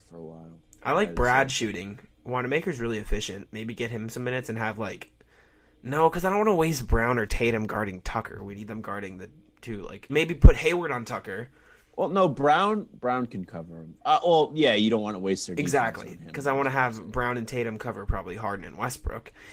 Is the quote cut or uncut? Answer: cut